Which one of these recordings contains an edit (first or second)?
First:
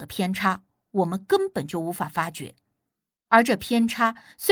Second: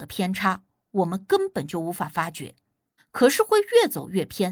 second